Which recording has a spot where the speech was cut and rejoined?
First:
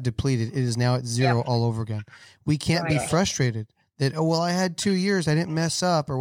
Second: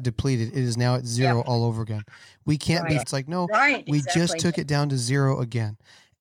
second; 1 cut; at 3.0 s

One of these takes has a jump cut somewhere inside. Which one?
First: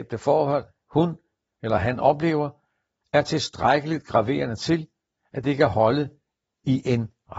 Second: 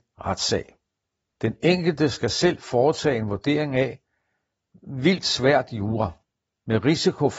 second; 1 cut; at 1.3 s

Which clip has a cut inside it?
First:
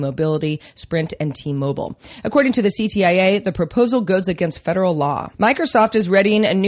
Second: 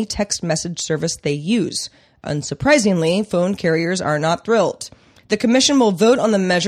first; 1 cut; at 5.3 s

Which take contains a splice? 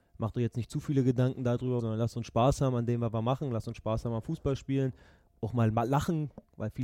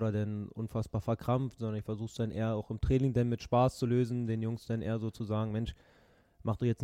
first; 1 cut; at 1.8 s

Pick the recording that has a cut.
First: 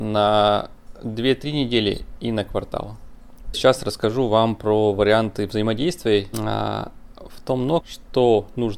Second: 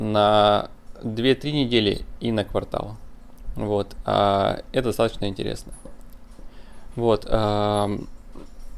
first; 3 cuts; at 3.5 s, 6.3 s, 7.8 s

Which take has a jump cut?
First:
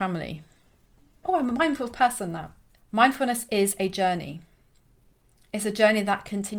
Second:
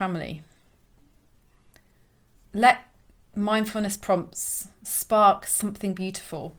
first; 2 cuts; at 1.2 s, 2.8 s

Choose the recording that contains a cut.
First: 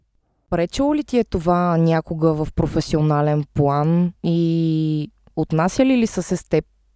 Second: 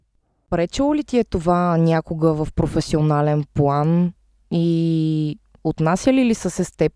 first; 1 cut; at 4.1 s

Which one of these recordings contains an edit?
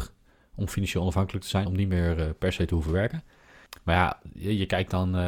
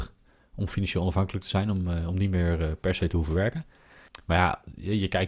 first; 1 cut; at 1.7 s

